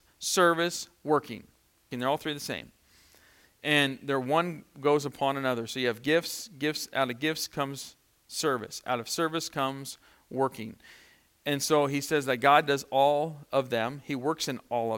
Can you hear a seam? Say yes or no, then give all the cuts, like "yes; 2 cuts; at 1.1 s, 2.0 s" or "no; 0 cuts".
yes; 1 cut; at 1.9 s